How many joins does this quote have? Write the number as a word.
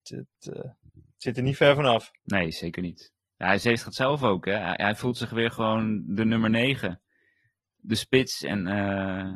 one